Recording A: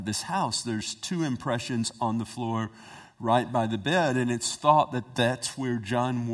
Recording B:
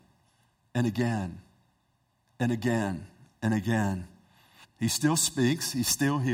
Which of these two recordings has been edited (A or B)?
B